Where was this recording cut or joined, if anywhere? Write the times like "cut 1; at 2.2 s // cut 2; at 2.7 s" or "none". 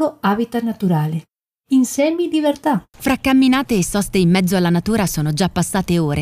cut 1; at 2.9 s